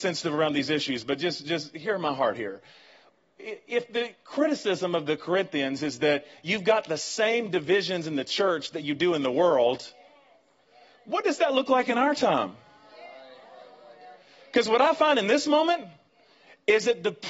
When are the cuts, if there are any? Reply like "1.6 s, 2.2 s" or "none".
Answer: none